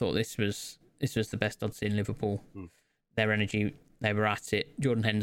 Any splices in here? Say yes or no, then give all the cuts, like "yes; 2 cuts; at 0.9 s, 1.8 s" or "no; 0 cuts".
no; 0 cuts